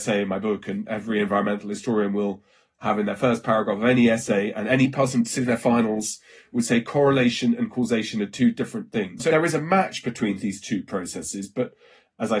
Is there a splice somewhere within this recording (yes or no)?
yes